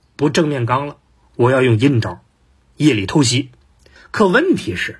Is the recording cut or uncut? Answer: cut